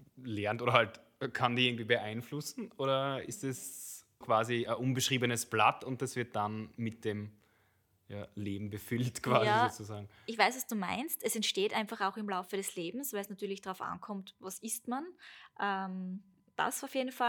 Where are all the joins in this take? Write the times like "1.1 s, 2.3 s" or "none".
4.2 s